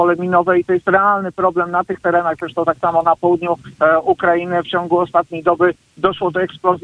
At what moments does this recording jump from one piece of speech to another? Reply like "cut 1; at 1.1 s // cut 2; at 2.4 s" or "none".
none